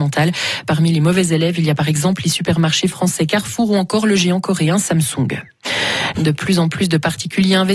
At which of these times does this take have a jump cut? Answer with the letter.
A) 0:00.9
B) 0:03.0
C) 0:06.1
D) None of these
C